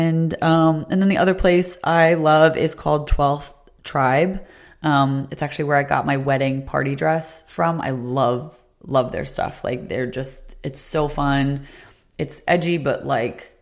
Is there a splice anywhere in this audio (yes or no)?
no